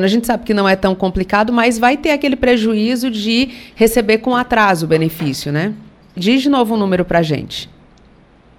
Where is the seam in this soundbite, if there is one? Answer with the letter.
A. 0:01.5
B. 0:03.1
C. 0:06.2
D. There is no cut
C